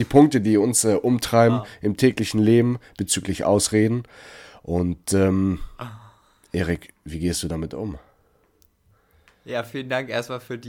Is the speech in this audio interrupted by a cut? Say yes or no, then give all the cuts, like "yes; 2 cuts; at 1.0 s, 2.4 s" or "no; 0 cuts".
no; 0 cuts